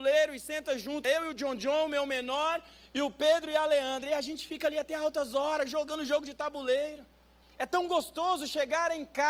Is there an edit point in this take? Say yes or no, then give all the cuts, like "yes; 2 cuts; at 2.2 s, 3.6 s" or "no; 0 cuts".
yes; 2 cuts; at 1.0 s, 7.4 s